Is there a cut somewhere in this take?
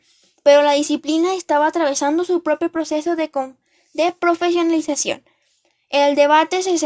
no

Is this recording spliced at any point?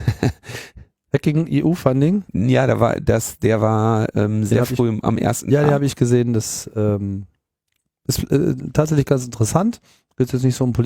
no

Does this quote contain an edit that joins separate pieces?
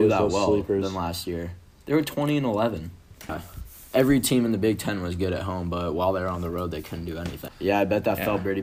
yes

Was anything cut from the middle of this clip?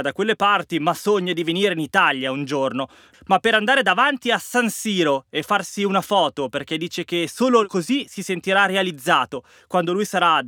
yes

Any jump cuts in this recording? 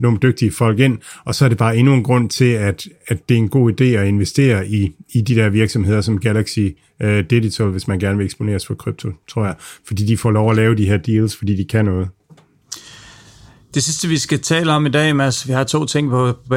no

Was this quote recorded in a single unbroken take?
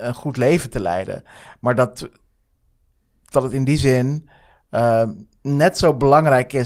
yes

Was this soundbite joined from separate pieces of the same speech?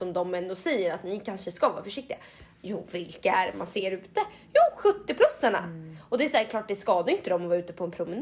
no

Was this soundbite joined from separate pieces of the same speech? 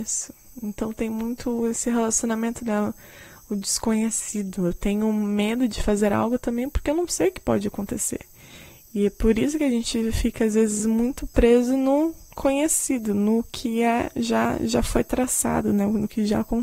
no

